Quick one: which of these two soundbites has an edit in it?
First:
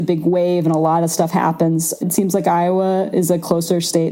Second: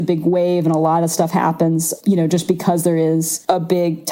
first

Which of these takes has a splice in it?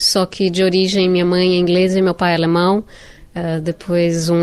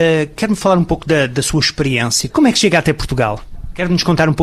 second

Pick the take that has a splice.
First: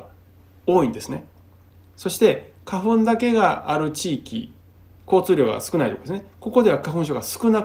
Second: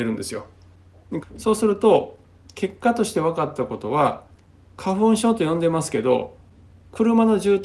second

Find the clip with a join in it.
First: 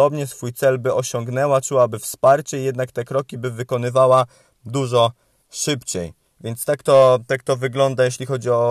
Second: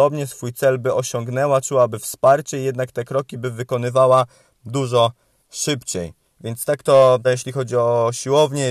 second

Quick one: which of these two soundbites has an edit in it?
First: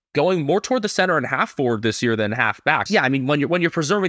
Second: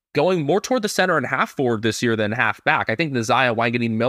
first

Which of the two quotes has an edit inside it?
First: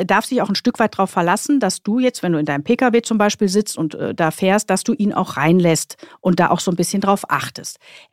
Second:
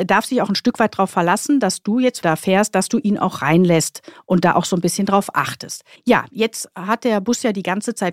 second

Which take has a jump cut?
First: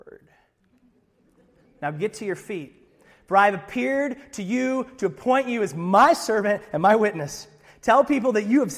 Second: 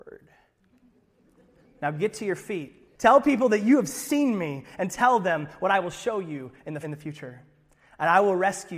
second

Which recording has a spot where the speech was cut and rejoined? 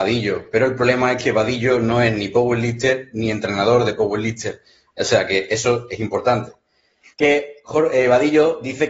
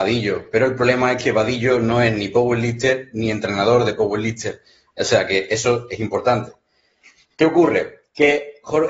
first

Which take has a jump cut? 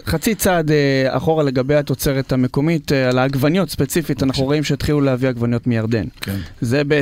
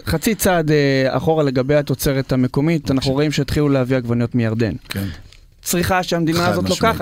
second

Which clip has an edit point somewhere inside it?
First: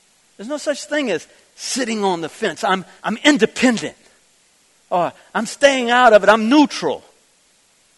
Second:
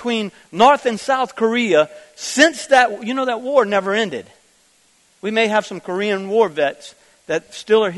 first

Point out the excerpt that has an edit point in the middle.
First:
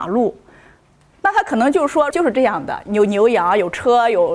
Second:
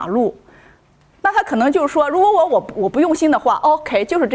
first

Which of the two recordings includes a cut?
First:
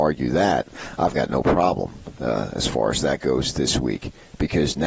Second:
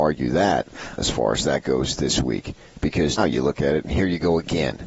second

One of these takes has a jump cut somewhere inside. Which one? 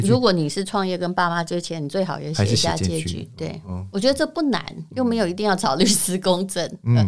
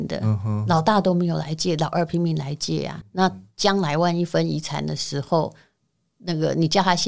second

